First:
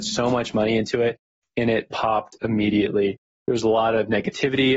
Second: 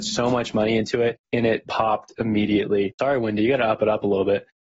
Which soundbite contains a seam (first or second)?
second